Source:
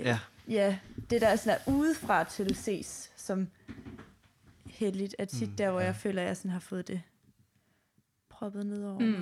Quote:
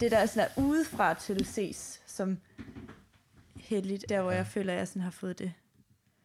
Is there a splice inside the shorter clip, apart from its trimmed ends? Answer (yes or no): yes